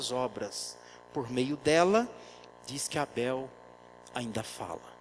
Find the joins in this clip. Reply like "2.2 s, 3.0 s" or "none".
2.5 s